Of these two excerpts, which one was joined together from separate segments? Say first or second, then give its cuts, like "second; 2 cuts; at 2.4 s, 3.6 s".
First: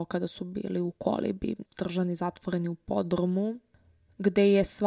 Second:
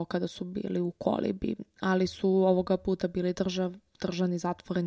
first; 1 cut; at 1.7 s